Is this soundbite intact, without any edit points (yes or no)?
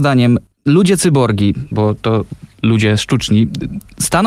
no